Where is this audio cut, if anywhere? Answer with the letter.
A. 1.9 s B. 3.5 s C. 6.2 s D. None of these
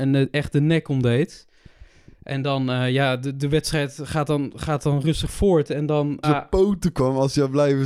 C